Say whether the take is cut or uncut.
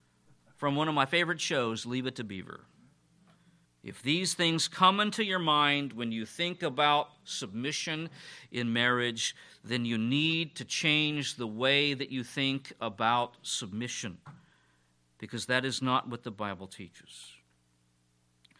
cut